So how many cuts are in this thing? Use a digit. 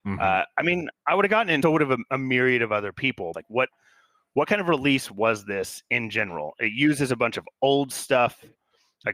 2